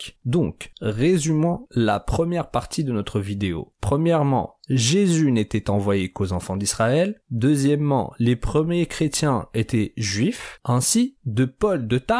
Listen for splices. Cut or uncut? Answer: cut